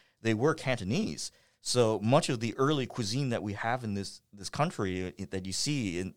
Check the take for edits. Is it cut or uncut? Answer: uncut